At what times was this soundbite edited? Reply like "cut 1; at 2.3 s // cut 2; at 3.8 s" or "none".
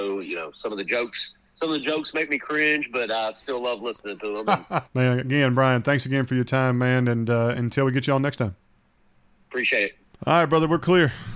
cut 1; at 4.8 s // cut 2; at 10.1 s